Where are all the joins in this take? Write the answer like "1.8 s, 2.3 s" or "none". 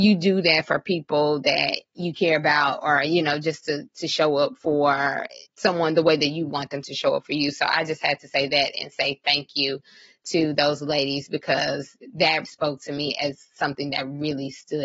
5.5 s, 12.4 s